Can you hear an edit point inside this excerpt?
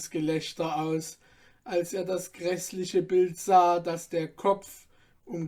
no; 0 cuts

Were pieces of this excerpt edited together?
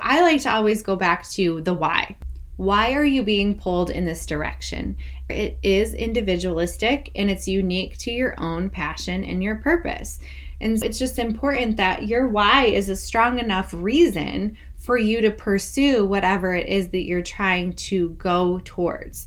yes; 2 cuts; at 5.3 s, 10.8 s

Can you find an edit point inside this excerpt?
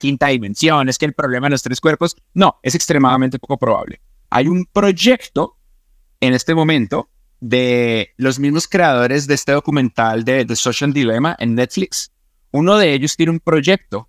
yes; 1 cut; at 4.3 s

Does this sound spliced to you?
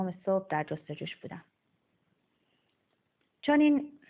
no; 0 cuts

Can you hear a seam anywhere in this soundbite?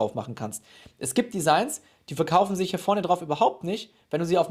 no; 0 cuts

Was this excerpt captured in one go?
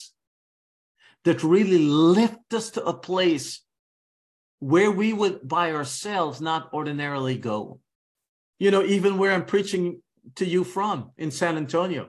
no; 1 cut; at 8.5 s

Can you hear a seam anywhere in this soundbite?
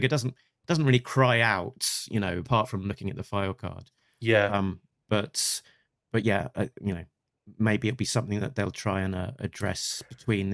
no; 0 cuts

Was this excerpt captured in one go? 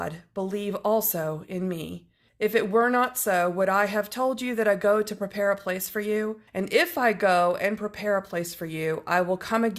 no; 2 cuts; at 2.3 s, 6.5 s

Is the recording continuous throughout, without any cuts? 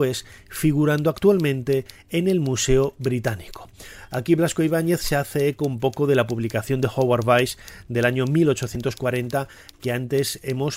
yes; 0 cuts

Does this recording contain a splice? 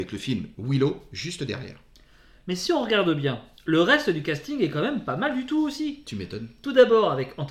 no; 0 cuts

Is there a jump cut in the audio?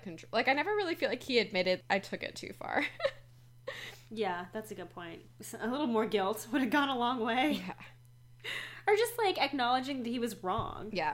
no; 0 cuts

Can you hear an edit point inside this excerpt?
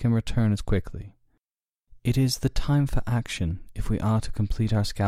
no; 0 cuts

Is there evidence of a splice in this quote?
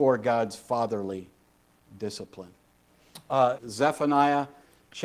yes; 1 cut; at 3.6 s

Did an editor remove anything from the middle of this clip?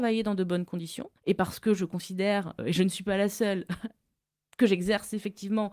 yes; 2 cuts; at 1.2 s, 2.6 s

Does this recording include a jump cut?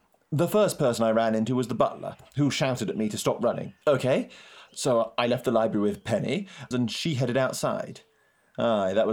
yes; 2 cuts; at 3.8 s, 6.7 s

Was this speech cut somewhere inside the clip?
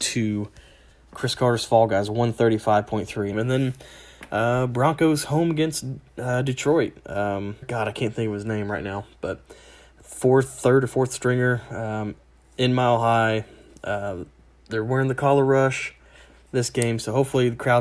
yes; 2 cuts; at 3.3 s, 7.6 s

